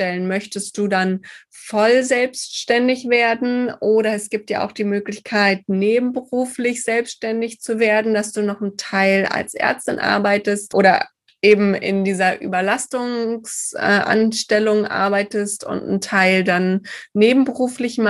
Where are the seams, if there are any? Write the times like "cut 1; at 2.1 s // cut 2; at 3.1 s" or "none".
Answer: none